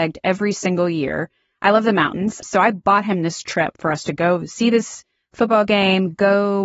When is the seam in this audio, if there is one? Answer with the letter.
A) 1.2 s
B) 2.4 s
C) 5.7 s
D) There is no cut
B